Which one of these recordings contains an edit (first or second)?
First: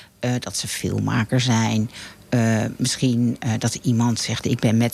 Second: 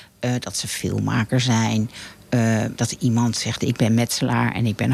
second